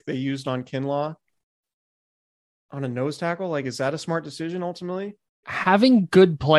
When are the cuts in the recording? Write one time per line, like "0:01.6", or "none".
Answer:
0:05.4